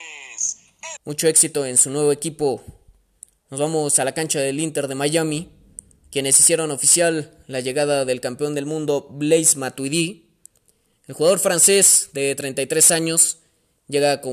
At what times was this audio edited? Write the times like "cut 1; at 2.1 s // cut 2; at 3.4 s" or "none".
cut 1; at 1.0 s